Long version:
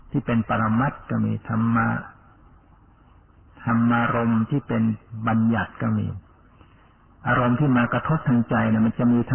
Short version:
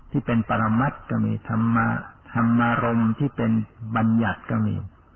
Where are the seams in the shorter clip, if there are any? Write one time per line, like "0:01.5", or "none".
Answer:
0:02.2

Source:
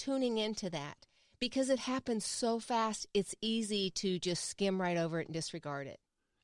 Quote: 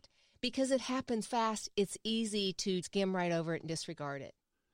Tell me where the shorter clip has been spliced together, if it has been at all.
0:01.2
0:02.8

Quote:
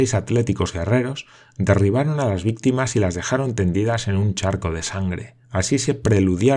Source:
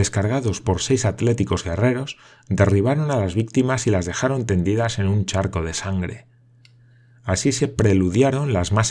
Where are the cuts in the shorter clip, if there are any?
0:05.4

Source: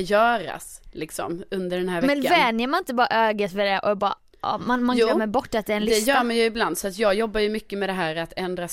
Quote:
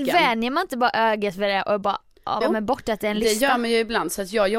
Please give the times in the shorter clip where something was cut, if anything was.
0:02.4

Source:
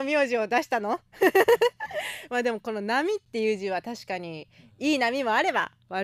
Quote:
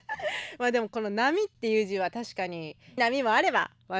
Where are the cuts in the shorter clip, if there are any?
0:03.0

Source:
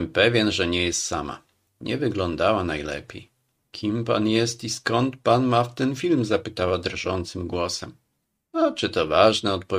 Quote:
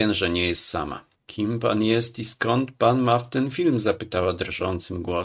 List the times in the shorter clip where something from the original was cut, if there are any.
0:01.1

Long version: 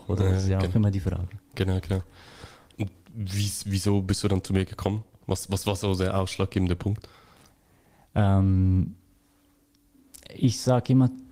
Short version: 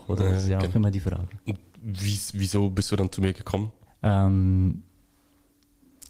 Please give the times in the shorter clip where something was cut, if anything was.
0:01.4
0:03.9

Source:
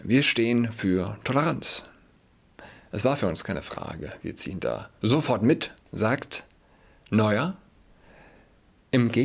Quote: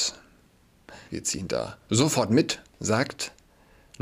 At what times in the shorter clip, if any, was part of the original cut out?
0:01.1

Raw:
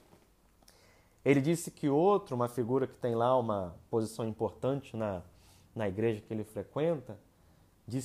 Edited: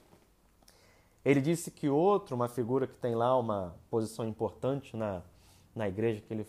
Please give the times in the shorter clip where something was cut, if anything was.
none

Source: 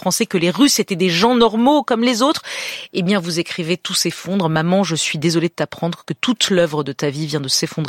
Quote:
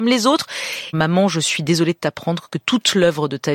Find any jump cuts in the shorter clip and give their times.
0:00.9

